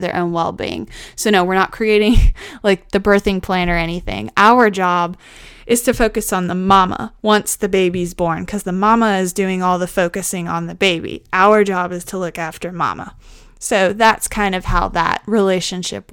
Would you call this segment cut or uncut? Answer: uncut